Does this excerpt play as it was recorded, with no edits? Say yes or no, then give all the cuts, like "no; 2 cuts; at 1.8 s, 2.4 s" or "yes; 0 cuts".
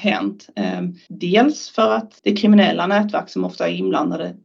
no; 2 cuts; at 1.1 s, 2.2 s